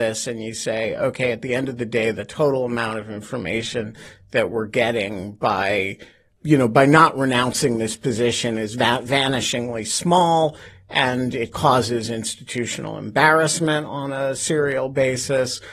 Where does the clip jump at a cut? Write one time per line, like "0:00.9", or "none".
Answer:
none